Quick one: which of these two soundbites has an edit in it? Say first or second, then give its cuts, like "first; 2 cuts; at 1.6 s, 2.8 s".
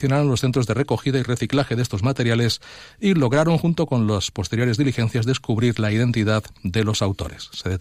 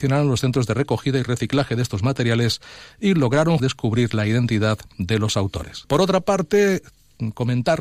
second; 2 cuts; at 3.6 s, 5.8 s